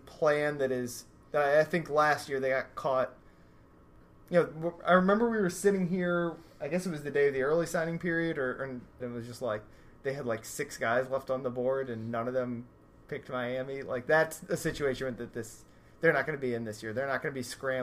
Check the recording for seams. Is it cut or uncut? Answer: cut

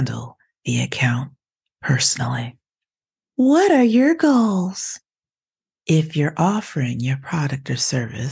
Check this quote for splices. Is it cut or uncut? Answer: uncut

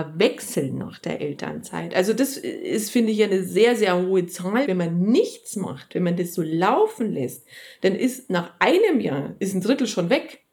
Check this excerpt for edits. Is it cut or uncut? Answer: cut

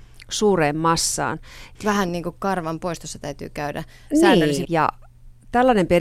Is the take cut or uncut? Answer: cut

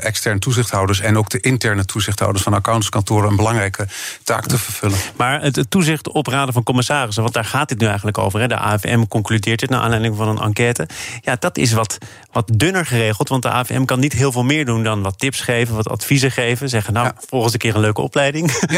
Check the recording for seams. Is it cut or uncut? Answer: uncut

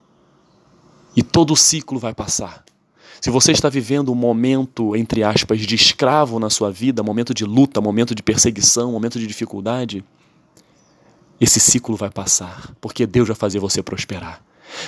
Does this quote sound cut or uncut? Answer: uncut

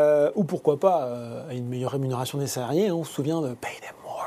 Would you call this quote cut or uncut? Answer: uncut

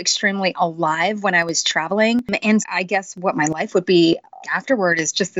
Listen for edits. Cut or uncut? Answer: cut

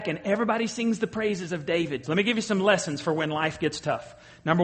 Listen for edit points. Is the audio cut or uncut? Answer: cut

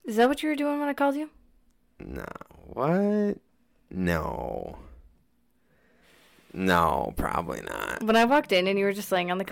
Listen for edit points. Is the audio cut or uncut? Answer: cut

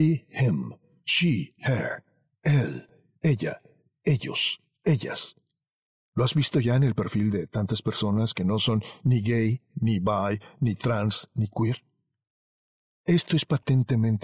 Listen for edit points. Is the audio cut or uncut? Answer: uncut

